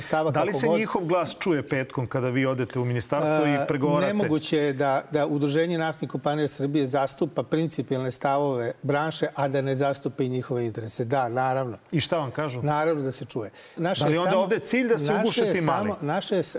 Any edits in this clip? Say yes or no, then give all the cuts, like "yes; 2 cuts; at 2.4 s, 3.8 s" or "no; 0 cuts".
yes; 1 cut; at 13.8 s